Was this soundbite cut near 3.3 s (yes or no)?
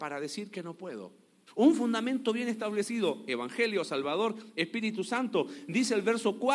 no